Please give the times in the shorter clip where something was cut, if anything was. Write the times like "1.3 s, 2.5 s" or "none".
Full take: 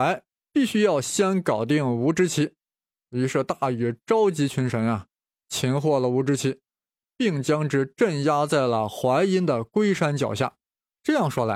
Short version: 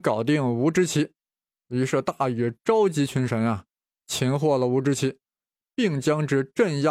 none